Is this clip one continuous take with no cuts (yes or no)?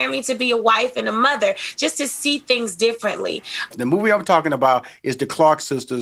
no